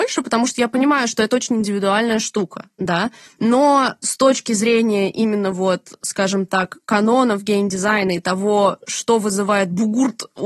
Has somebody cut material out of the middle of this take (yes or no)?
yes